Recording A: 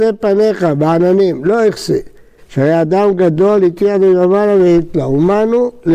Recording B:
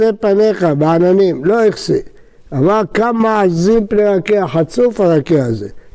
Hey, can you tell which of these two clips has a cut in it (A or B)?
A